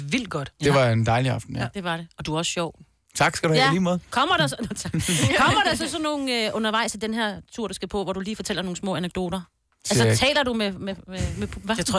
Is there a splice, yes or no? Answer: no